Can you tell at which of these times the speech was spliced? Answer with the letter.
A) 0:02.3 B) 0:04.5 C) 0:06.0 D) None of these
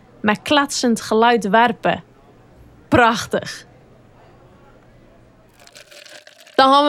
D